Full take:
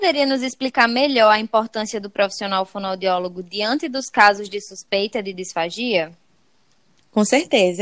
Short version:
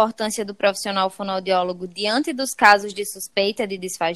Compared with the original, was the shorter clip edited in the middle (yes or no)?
no